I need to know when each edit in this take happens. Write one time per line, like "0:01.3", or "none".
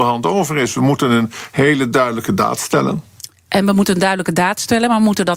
none